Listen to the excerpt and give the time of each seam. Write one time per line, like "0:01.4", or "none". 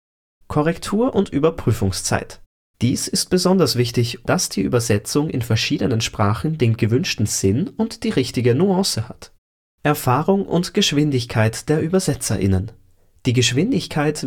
0:02.7
0:04.2